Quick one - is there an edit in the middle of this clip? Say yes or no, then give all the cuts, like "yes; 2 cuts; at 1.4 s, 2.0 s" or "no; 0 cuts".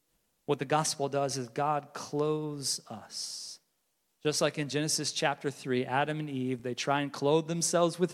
no; 0 cuts